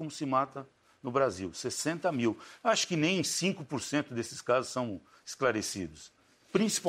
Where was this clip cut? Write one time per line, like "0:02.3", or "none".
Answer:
none